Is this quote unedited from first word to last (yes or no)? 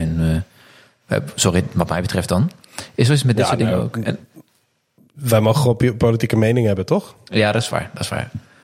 yes